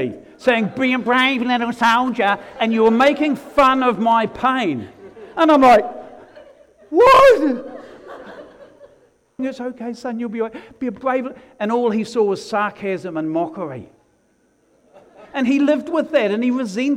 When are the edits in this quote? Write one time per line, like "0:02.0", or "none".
0:09.4

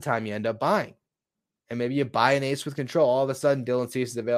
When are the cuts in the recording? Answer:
none

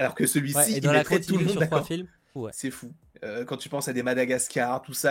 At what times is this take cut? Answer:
0:02.4

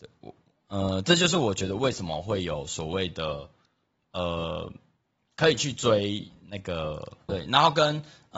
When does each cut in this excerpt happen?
0:07.3

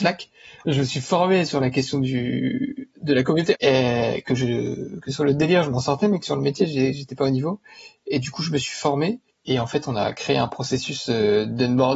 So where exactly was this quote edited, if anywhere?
0:03.5

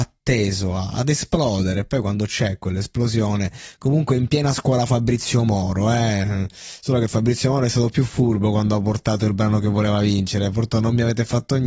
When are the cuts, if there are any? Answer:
none

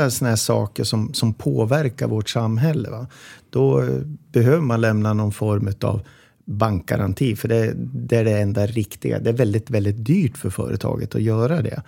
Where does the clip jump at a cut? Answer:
none

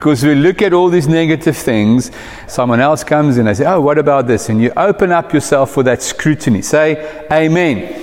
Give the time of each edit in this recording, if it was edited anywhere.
0:02.5

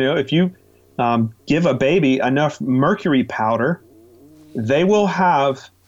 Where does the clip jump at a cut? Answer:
none

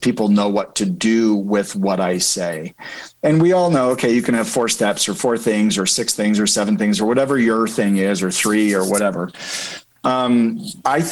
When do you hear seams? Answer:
none

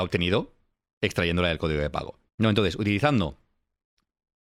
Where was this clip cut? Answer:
0:02.3

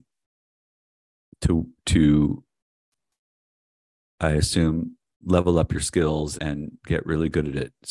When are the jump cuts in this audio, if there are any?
0:05.2
0:06.4

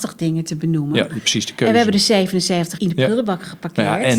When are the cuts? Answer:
0:02.8

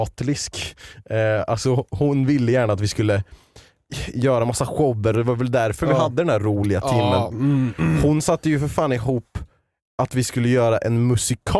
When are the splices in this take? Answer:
none

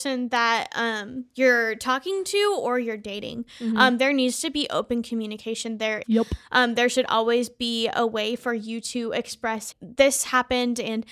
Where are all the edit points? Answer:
0:06.0
0:09.7

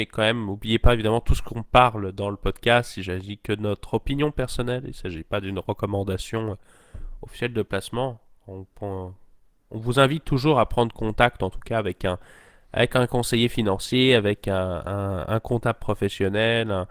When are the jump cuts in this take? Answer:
none

